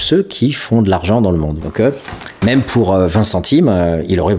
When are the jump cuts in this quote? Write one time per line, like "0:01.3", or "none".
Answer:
0:01.6